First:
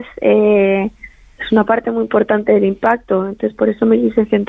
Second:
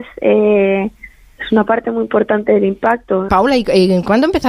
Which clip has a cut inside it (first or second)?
second